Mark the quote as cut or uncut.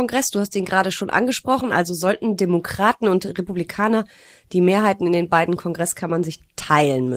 uncut